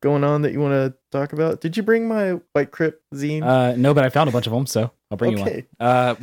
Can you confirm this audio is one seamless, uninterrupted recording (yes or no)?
no